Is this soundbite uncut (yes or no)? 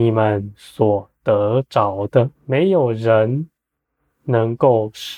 no